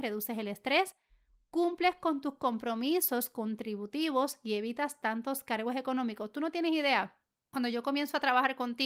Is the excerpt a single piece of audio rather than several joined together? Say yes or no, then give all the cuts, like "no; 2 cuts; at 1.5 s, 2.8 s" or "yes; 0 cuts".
yes; 0 cuts